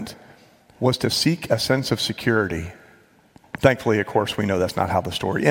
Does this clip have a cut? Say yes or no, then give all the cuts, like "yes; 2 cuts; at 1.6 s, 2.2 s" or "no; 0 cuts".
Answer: yes; 1 cut; at 3.4 s